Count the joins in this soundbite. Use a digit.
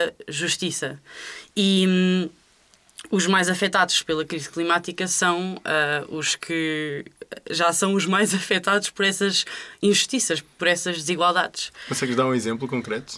0